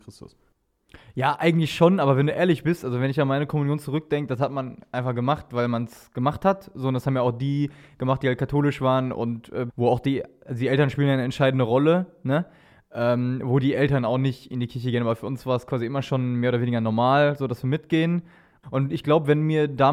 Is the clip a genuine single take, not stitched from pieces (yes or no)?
no